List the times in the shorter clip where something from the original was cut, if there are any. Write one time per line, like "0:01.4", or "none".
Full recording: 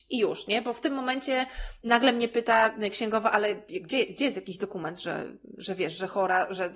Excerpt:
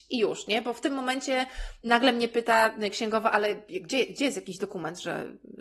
none